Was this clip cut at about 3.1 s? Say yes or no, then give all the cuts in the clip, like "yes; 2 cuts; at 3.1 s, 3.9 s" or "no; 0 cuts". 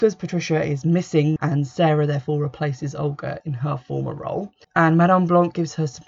no; 2 cuts; at 1.4 s, 4.6 s